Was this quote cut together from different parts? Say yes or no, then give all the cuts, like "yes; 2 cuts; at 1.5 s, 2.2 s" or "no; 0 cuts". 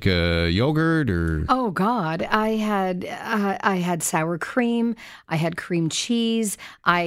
no; 0 cuts